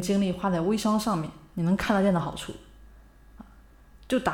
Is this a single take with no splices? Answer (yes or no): no